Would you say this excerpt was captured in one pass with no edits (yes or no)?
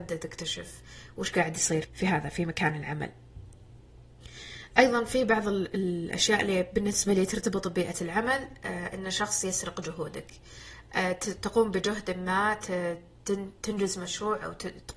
no